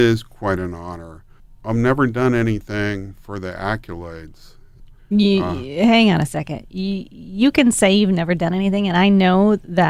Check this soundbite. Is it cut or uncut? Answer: cut